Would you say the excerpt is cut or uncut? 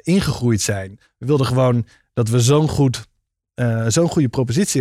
cut